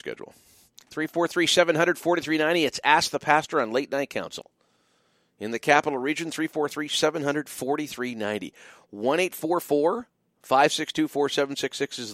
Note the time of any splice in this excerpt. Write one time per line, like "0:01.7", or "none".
none